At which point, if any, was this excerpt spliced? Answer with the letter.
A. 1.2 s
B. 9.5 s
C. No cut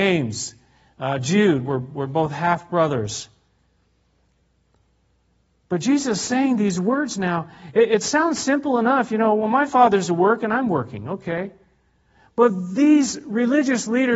C